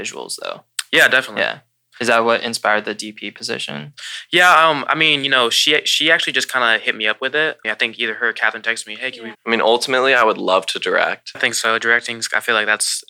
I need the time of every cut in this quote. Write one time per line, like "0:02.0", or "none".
0:07.6
0:09.3
0:11.3